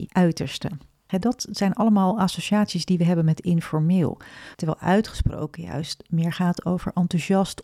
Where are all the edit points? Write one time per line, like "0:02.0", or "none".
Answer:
0:01.1
0:04.5

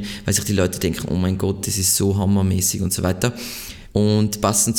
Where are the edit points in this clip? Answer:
0:03.9

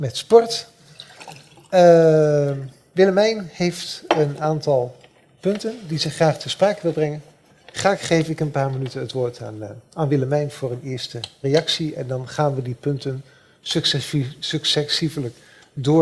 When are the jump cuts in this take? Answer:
none

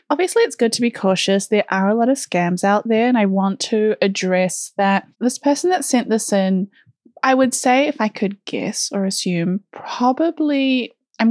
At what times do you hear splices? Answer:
0:05.1

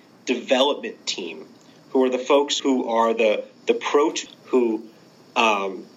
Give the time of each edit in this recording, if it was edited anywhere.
0:02.6
0:04.3

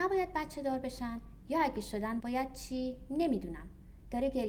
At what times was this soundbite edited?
0:02.2

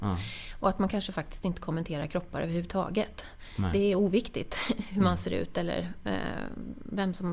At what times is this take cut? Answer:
none

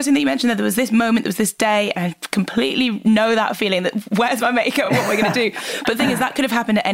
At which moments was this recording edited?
none

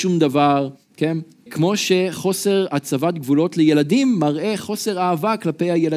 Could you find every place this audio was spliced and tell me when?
0:01.5

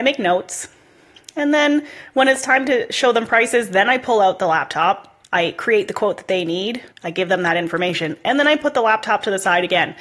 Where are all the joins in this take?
0:05.2
0:06.9

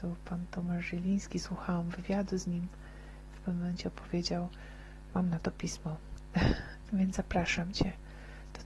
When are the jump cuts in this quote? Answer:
0:05.1
0:06.9

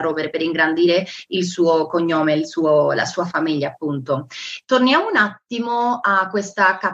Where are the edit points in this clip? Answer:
0:04.6

